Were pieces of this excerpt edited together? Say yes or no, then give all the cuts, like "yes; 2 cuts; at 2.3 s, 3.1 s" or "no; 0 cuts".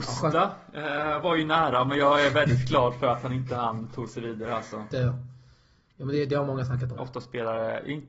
yes; 2 cuts; at 4.9 s, 7.0 s